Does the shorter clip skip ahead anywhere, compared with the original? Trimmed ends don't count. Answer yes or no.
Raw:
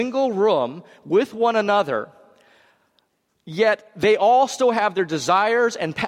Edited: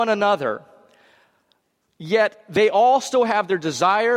no